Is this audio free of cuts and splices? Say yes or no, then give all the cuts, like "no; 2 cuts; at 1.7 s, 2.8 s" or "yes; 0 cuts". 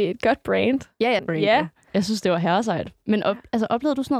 no; 1 cut; at 1.2 s